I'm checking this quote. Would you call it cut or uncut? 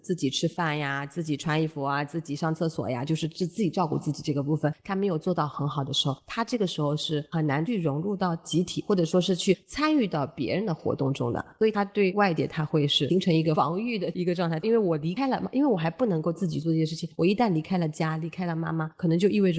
uncut